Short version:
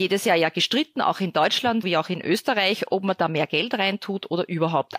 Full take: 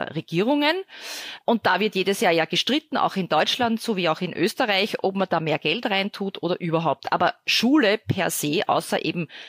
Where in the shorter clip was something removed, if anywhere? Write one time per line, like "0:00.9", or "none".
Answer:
0:01.8